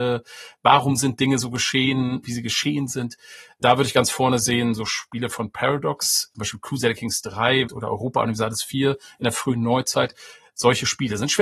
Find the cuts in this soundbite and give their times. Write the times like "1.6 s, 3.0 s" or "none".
6.3 s, 7.7 s